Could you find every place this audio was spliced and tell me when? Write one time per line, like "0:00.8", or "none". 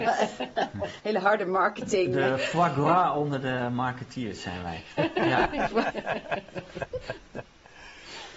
none